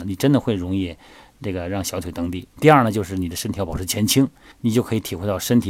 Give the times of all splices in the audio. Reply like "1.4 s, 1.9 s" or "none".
2.5 s, 4.5 s